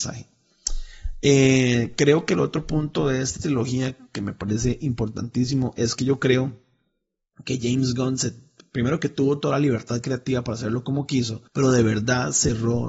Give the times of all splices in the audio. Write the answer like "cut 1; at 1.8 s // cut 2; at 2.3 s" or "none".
cut 1; at 11.5 s